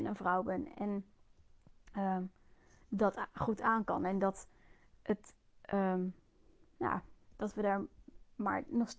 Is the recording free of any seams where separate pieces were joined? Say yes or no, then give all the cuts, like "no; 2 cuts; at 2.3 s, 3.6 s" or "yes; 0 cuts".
yes; 0 cuts